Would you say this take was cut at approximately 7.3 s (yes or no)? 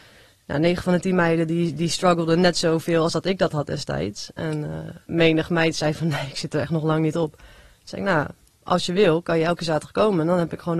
no